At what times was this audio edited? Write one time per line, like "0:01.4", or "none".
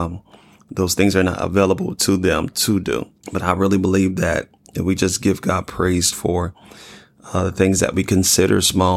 0:03.2
0:06.1